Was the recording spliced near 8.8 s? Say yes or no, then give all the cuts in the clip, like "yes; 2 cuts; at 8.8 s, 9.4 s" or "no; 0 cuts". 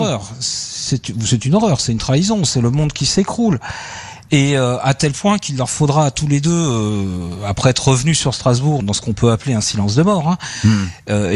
yes; 1 cut; at 8.8 s